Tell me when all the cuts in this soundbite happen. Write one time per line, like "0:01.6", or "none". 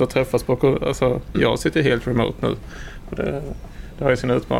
0:01.3

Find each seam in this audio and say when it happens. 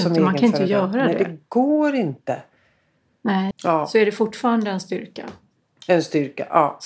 0:03.5

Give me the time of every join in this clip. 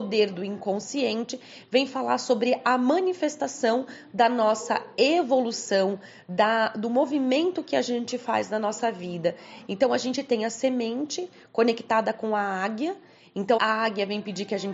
0:09.7
0:13.6

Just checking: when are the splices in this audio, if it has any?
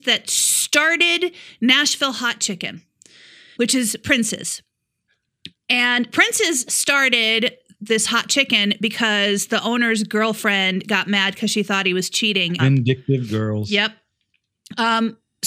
0:03.6
0:12.6

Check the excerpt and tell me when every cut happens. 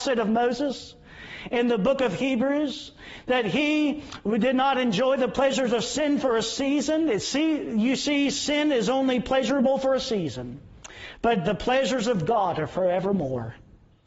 none

